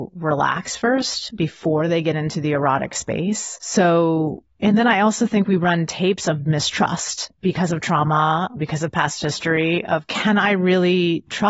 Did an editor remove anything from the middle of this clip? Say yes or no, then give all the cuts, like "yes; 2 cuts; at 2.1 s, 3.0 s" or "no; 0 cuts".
no; 0 cuts